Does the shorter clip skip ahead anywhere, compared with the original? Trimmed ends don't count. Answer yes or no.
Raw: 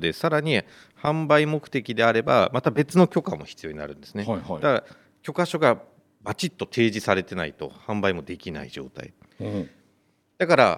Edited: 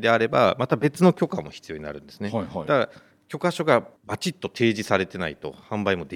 yes